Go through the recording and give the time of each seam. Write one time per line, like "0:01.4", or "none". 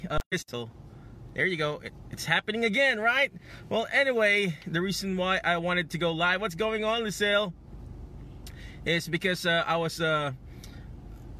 none